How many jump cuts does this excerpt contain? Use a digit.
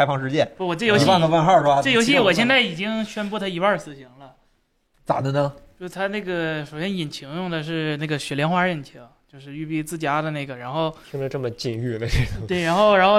0